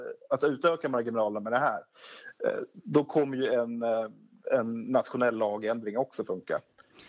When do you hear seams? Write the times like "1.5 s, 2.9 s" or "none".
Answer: none